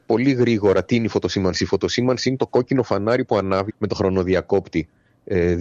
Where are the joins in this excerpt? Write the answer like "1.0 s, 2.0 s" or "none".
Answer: 3.7 s